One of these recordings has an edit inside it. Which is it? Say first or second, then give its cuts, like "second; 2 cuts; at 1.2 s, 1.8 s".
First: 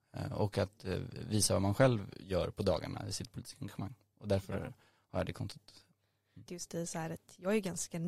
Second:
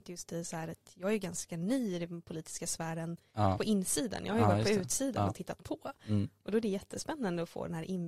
first; 1 cut; at 6.5 s